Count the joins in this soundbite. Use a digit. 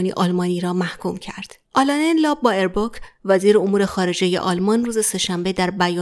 1